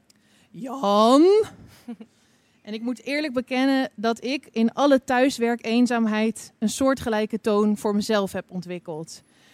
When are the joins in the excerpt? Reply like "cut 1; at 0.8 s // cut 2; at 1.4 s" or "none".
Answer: none